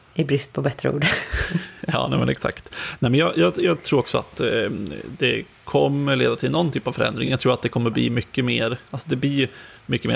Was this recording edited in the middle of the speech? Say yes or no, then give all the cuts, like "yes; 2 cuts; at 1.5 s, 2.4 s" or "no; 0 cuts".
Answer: no; 0 cuts